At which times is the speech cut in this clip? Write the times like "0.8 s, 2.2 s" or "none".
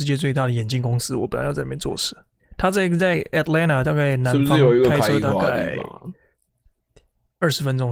2.4 s

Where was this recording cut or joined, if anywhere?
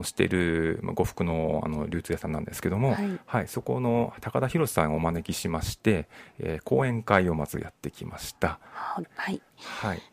9.0 s

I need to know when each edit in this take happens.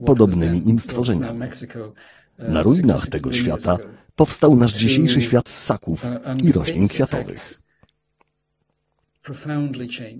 none

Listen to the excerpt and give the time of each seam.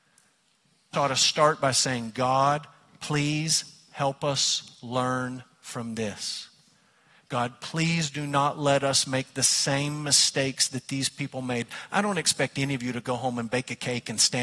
0.9 s

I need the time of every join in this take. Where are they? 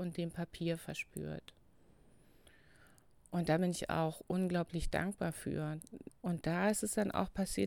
6.1 s

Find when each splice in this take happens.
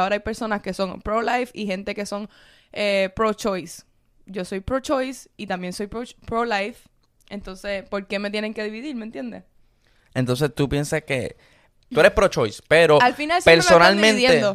11.9 s

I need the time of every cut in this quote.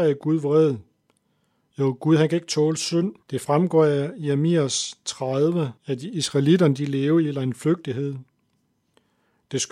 3.2 s, 5.8 s

